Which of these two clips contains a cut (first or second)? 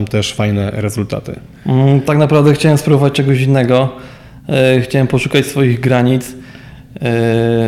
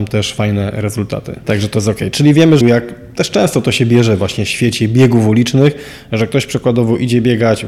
second